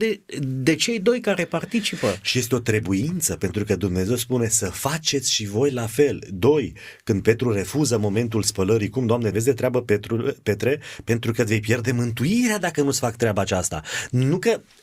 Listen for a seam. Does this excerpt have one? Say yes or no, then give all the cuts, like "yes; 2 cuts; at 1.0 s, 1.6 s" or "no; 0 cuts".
yes; 1 cut; at 9.3 s